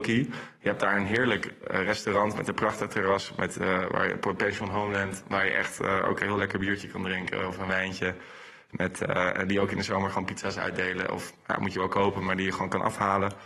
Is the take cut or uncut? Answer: uncut